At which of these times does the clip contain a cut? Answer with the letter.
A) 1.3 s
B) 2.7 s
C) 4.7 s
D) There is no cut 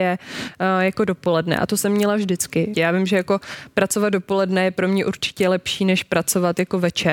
B